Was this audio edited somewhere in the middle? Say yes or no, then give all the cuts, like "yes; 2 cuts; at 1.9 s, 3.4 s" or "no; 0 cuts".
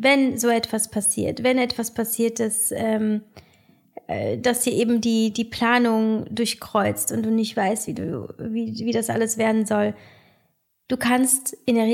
no; 0 cuts